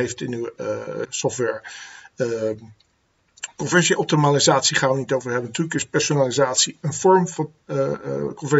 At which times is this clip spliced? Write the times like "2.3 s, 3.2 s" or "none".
1.0 s